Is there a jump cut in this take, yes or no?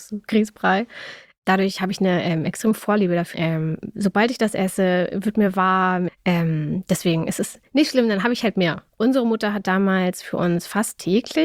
yes